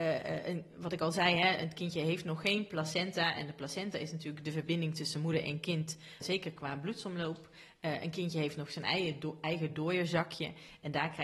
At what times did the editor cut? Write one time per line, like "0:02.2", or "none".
0:06.2